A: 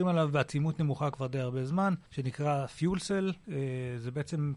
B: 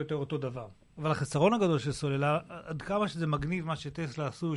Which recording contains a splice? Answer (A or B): A